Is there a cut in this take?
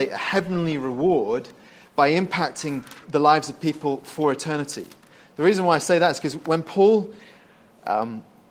yes; 1 cut; at 3.0 s

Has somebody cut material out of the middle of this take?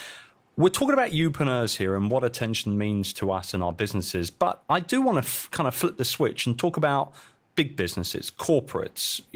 no; 0 cuts

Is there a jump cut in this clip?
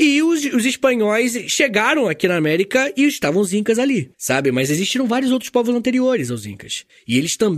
no; 0 cuts

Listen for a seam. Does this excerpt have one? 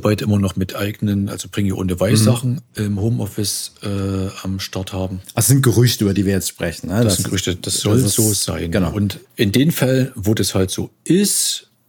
yes; 1 cut; at 9.2 s

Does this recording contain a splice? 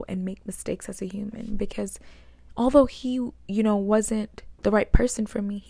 yes; 1 cut; at 4.6 s

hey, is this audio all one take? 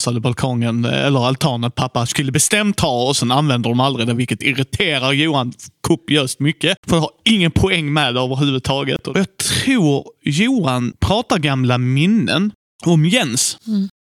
yes; 0 cuts

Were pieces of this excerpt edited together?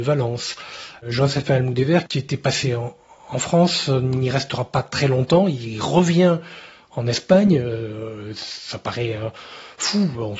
no; 0 cuts

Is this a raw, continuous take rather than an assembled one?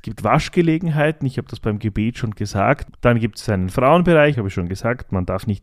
no; 2 cuts; at 2.9 s, 4.3 s

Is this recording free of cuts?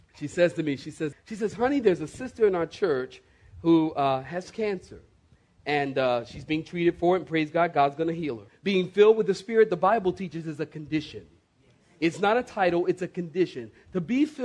no; 2 cuts; at 1.1 s, 8.5 s

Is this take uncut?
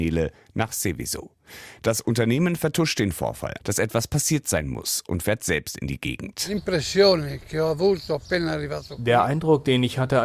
no; 1 cut; at 3.6 s

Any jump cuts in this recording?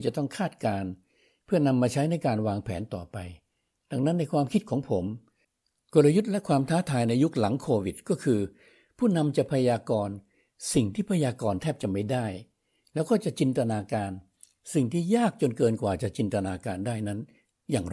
no; 0 cuts

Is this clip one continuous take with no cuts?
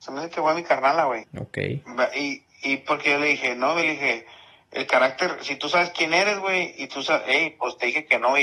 no; 1 cut; at 1.2 s

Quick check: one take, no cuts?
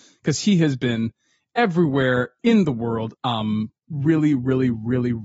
no; 1 cut; at 3.1 s

